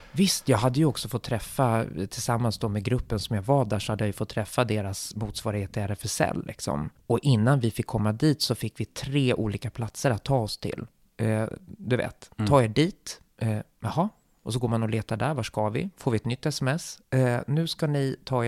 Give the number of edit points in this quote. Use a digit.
1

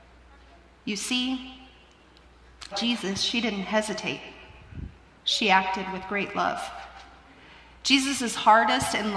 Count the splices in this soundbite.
1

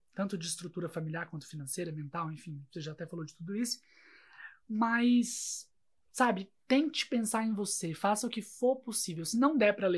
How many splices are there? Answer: 1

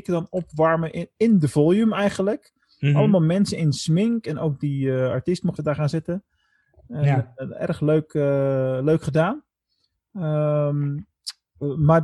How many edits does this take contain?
1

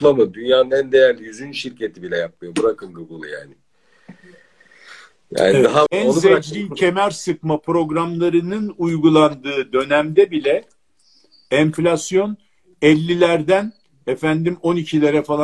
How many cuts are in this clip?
1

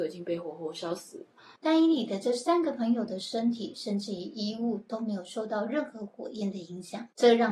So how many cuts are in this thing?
1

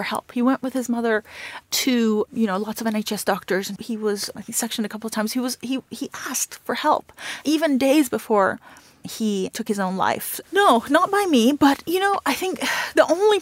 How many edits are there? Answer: 2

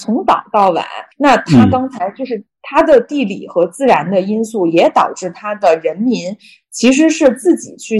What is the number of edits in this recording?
1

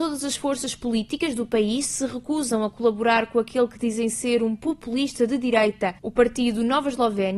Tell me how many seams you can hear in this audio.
0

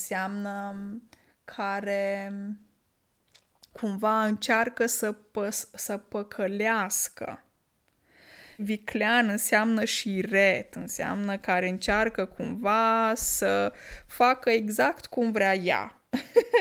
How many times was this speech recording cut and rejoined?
1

